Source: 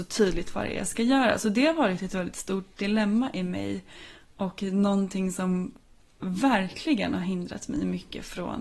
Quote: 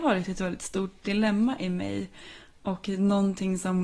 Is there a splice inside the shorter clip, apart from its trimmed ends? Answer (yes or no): no